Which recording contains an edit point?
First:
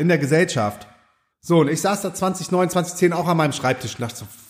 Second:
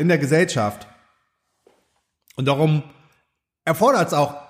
first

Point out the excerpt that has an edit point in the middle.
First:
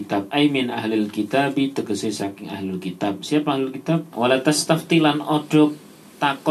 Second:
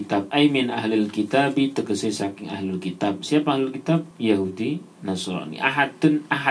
first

